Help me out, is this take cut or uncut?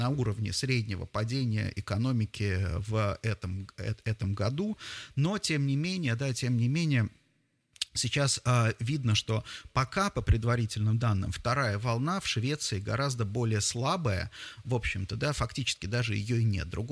uncut